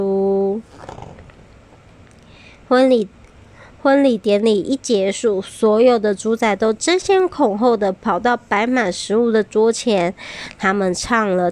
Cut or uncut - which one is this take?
uncut